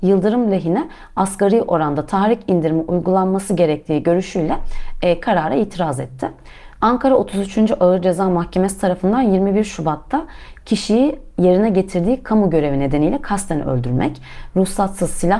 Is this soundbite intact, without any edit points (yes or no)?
no